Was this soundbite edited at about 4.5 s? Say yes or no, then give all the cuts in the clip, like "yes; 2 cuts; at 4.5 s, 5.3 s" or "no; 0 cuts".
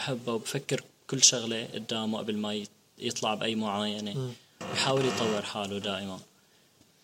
no; 0 cuts